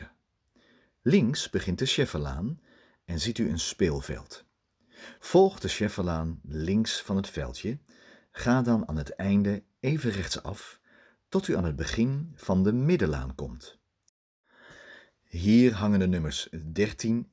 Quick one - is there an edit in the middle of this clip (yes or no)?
yes